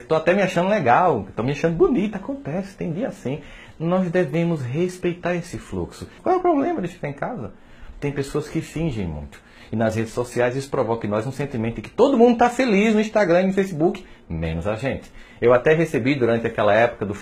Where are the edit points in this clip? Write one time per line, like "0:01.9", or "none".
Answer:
0:03.7
0:06.2
0:07.9